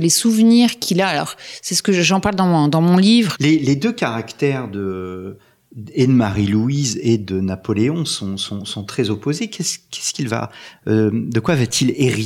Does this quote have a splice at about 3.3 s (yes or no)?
yes